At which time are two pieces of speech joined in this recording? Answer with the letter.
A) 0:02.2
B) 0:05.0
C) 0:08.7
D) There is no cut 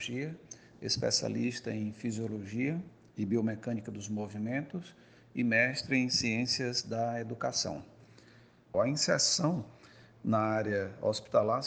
C